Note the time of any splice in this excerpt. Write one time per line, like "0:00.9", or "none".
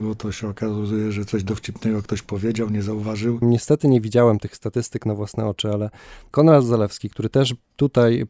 0:03.4